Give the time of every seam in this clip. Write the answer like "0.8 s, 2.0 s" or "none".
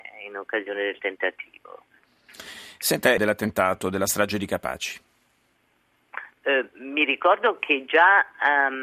3.2 s, 6.4 s